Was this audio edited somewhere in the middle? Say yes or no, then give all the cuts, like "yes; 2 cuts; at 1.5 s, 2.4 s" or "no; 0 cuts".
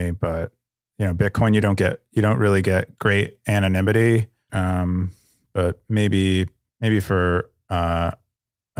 yes; 1 cut; at 4.5 s